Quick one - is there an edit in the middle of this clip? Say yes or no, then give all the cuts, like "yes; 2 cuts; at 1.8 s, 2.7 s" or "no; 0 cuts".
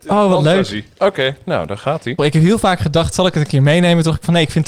yes; 1 cut; at 2.2 s